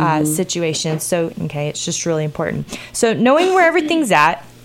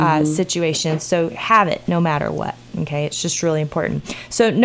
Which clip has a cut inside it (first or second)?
first